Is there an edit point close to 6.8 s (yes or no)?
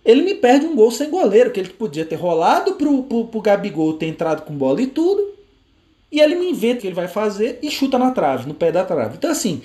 yes